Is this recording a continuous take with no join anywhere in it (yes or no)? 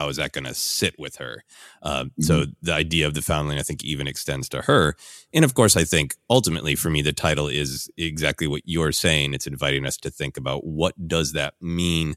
yes